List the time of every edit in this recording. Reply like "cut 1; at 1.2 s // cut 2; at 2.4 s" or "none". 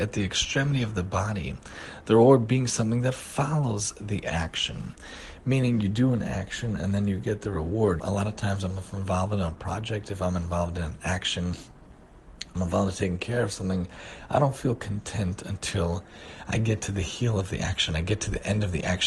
cut 1; at 8.0 s